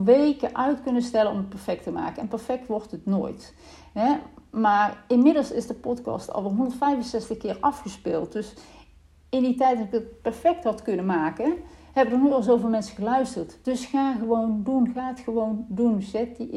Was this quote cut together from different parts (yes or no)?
no